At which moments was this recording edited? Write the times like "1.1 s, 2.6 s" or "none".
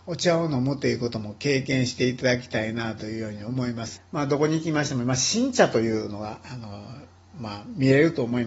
4.0 s